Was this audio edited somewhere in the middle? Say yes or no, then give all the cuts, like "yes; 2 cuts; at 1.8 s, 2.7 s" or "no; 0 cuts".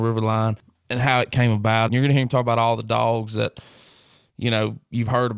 yes; 1 cut; at 1.9 s